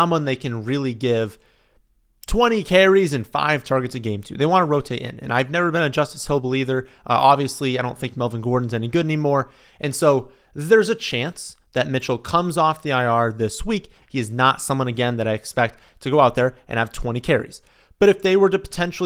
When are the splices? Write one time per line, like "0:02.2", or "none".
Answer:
0:14.0